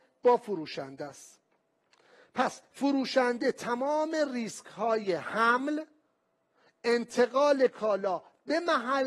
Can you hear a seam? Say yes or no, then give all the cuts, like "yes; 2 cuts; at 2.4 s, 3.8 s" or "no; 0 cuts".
no; 0 cuts